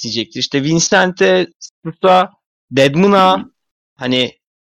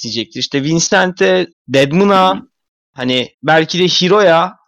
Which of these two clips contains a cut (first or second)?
second